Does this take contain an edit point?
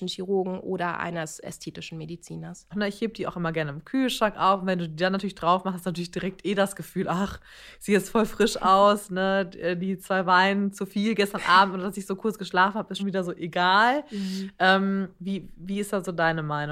yes; 2 cuts; at 2.7 s, 13.0 s

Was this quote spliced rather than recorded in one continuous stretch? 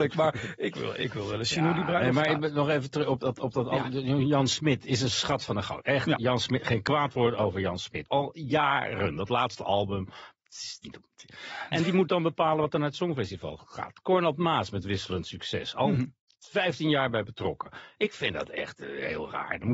yes; 1 cut; at 8.1 s

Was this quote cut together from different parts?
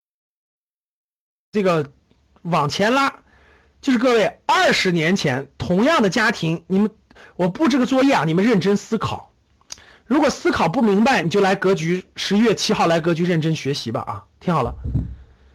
no; 0 cuts

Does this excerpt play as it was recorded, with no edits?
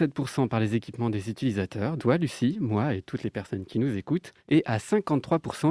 no; 2 cuts; at 2.0 s, 4.4 s

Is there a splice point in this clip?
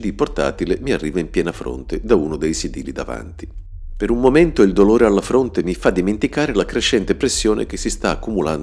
no; 0 cuts

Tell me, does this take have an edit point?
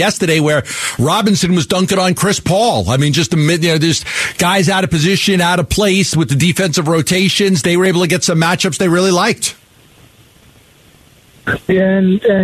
no; 0 cuts

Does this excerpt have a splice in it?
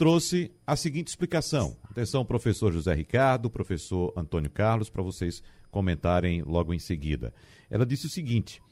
no; 0 cuts

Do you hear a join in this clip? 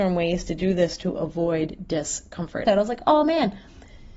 yes; 1 cut; at 2.7 s

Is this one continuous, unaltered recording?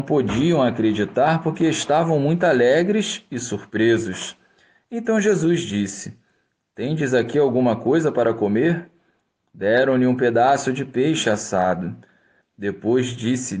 no; 1 cut; at 12.4 s

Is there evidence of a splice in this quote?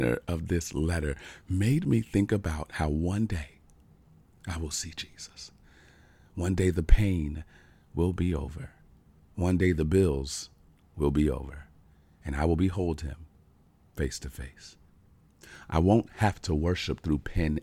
no; 0 cuts

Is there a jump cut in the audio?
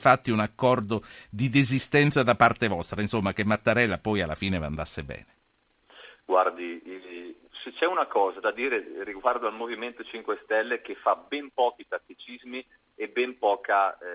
no; 0 cuts

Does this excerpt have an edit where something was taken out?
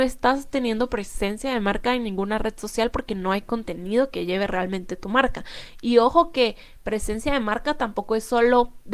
no; 0 cuts

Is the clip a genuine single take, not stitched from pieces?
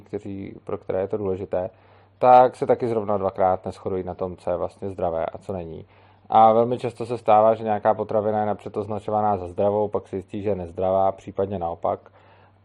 yes; 0 cuts

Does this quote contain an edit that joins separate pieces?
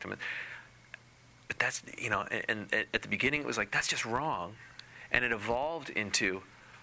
no; 0 cuts

